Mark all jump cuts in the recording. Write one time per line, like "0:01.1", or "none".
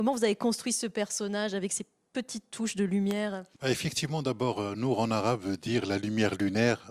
0:03.5